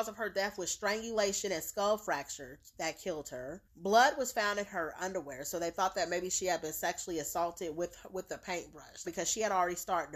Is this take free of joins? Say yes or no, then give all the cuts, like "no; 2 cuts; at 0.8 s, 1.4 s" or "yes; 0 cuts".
no; 2 cuts; at 3.6 s, 9.0 s